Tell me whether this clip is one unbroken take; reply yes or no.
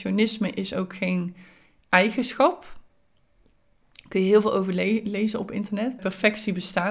no